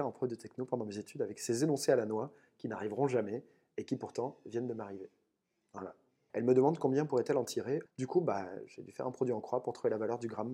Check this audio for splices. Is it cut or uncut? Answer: cut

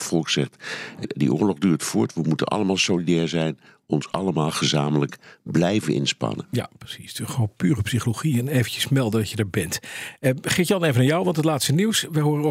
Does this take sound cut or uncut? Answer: cut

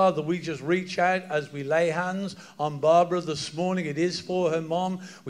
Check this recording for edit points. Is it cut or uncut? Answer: uncut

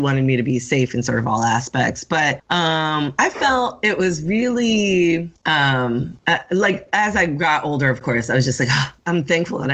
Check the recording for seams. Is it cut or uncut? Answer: uncut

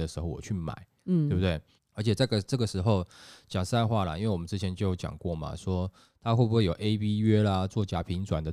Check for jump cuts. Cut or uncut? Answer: cut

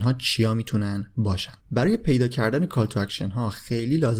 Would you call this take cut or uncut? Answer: cut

